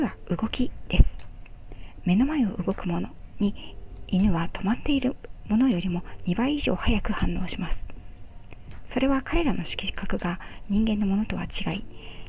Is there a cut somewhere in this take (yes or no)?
no